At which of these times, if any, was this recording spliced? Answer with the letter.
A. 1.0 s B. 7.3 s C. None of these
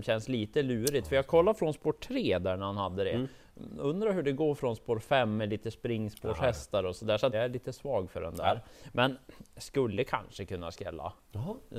B